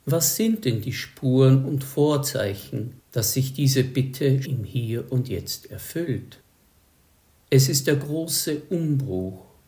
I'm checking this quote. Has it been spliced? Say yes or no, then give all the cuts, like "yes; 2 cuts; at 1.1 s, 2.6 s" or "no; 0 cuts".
yes; 2 cuts; at 4.4 s, 7.3 s